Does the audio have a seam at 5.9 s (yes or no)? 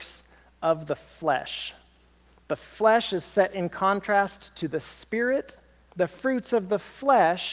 yes